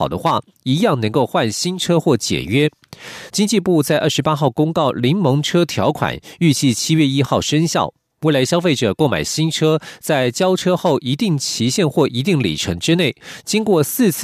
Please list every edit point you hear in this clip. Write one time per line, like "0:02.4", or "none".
0:03.3